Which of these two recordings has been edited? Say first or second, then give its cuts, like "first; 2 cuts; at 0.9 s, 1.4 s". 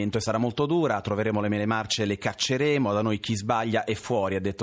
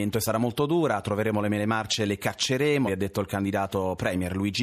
second; 1 cut; at 2.9 s